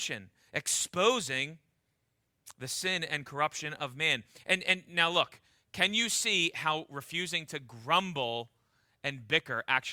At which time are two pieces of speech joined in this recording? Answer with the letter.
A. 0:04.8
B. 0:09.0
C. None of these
C